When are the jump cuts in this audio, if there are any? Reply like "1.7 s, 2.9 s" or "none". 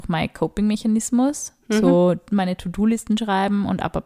none